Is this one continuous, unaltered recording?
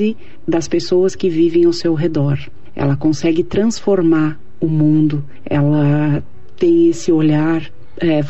yes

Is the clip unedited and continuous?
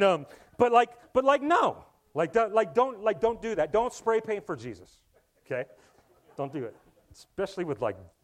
yes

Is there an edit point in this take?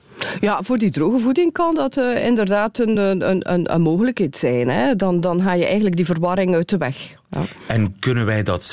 no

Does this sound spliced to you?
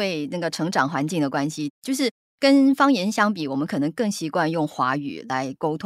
no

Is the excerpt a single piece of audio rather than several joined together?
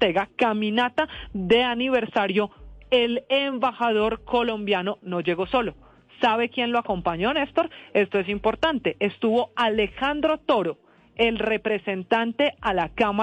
yes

